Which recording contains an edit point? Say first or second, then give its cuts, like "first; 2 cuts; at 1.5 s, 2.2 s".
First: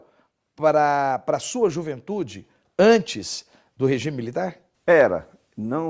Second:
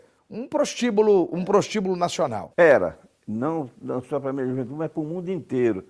second; 1 cut; at 2.5 s